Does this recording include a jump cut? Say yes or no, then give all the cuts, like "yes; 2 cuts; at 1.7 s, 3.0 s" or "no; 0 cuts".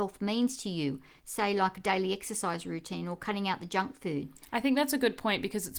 no; 0 cuts